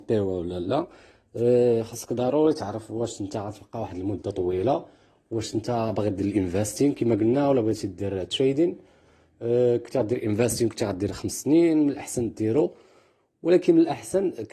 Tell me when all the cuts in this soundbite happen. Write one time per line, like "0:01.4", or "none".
none